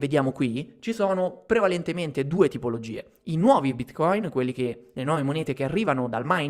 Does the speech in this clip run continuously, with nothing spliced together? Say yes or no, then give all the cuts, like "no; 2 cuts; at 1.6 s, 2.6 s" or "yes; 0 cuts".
yes; 0 cuts